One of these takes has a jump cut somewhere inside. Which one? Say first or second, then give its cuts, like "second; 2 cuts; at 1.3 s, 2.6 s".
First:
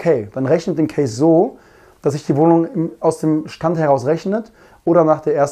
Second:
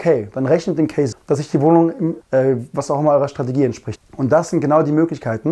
second; 3 cuts; at 1.1 s, 2.2 s, 4.0 s